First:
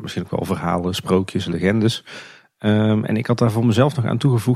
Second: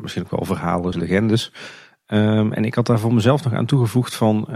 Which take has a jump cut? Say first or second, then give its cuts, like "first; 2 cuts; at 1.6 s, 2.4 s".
second; 1 cut; at 0.9 s